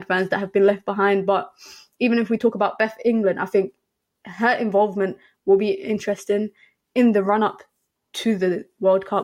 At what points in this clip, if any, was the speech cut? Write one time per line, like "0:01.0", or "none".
none